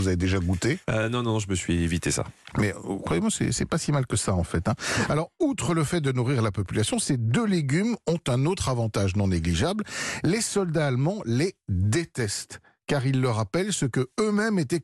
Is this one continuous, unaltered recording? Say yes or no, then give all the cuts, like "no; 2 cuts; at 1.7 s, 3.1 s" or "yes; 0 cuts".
yes; 0 cuts